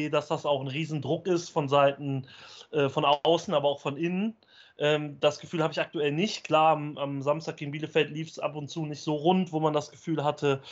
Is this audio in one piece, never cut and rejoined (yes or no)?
yes